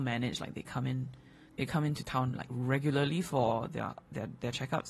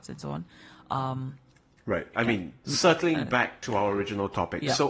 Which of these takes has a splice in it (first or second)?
second